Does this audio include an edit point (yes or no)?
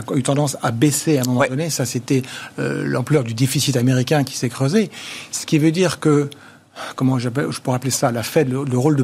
no